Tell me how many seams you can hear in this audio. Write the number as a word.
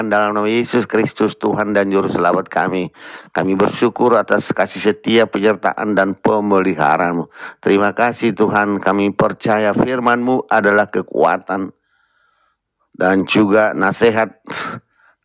zero